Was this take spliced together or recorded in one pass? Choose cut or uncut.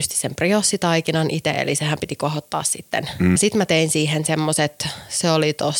cut